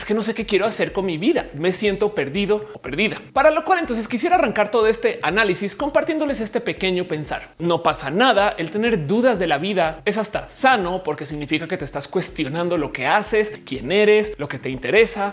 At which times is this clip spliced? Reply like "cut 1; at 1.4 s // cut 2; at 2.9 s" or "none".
cut 1; at 7.6 s

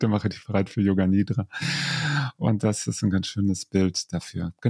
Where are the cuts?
cut 1; at 3.0 s

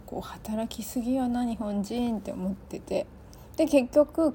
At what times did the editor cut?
none

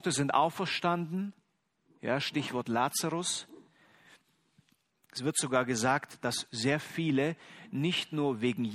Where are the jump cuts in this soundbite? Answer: none

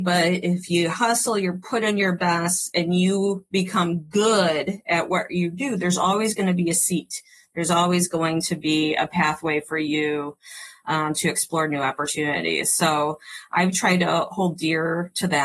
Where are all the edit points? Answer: none

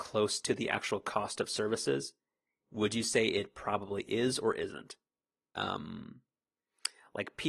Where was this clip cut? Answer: cut 1; at 5.5 s

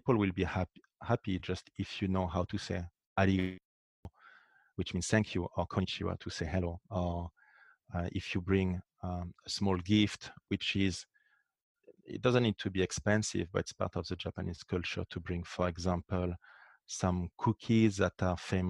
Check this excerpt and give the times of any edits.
none

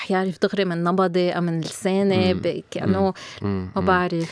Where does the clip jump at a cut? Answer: cut 1; at 3.4 s

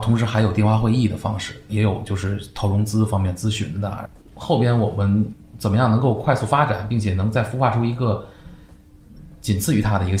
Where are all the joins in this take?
cut 1; at 1.7 s // cut 2; at 4.2 s

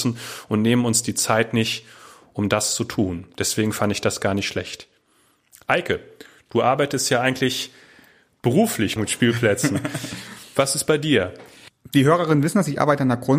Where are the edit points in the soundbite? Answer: cut 1; at 9.0 s

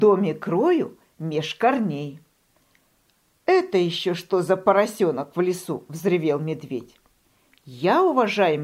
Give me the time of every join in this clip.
none

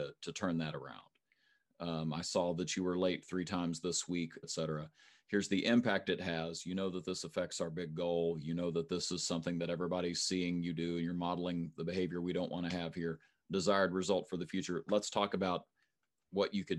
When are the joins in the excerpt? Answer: cut 1; at 1.7 s // cut 2; at 4.4 s

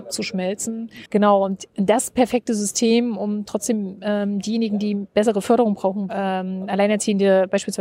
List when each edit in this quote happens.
cut 1; at 1.1 s // cut 2; at 6.1 s

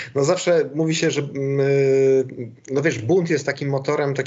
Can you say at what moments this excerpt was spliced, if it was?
none

